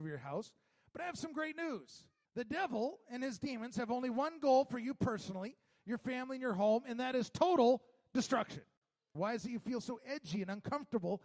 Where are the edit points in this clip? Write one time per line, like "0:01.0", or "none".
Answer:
0:02.2
0:09.1